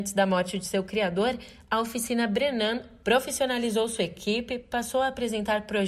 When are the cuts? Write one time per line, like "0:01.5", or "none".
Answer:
none